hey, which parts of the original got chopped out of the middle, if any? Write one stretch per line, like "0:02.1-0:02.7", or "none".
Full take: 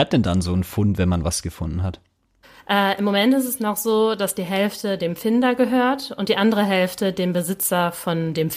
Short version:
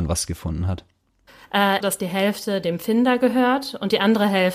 0:03.0-0:04.2